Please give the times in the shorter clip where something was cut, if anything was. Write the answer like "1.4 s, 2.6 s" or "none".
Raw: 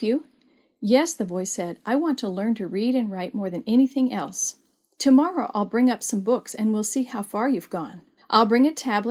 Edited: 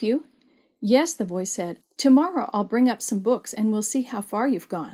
1.8 s